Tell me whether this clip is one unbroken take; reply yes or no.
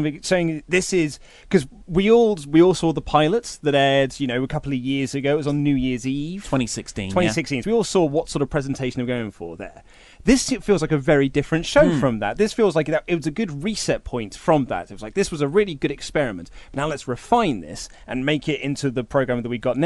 no